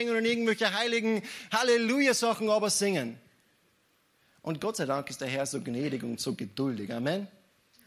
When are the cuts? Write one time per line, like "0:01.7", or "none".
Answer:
none